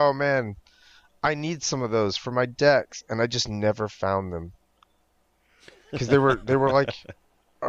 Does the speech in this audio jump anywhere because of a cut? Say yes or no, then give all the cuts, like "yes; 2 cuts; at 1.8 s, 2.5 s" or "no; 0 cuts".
no; 0 cuts